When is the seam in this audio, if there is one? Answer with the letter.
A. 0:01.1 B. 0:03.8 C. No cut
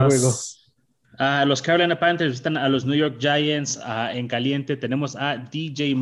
C